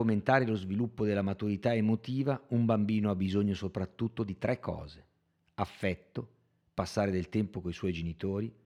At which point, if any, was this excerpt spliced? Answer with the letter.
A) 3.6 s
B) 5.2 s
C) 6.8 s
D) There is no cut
D